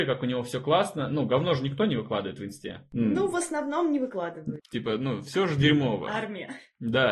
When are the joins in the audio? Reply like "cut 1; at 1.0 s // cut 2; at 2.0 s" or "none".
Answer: cut 1; at 4.6 s